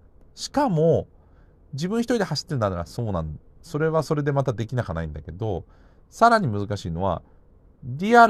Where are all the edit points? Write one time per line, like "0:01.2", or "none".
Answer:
none